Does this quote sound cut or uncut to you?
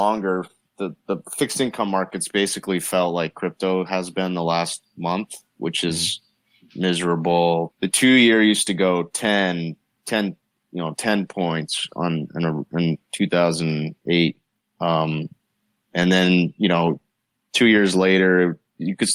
cut